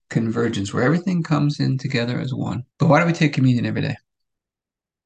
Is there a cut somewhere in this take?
yes; 1 cut; at 2.7 s

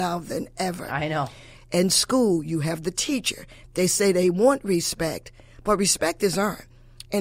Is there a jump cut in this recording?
yes; 2 cuts; at 1.6 s, 3.7 s

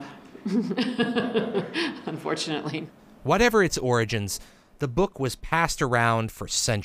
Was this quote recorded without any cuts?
yes; 0 cuts

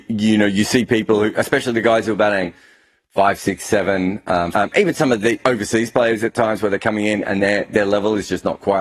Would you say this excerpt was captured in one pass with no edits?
no; 1 cut; at 4.5 s

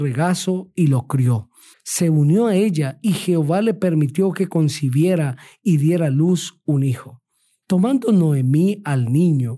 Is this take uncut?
no; 2 cuts; at 1.7 s, 7.6 s

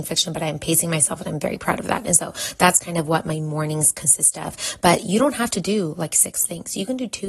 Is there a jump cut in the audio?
no; 0 cuts

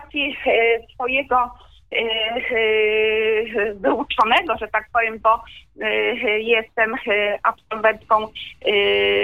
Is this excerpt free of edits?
no; 1 cut; at 5.2 s

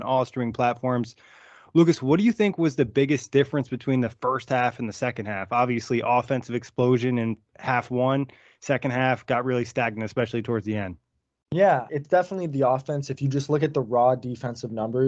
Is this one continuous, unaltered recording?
no; 1 cut; at 11.9 s

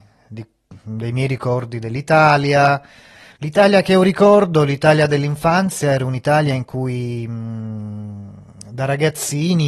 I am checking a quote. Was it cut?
yes; 1 cut; at 3.3 s

